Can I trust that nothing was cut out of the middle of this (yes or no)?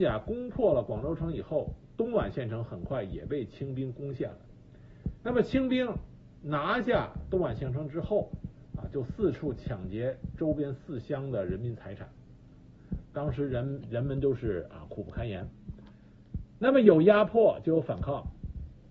yes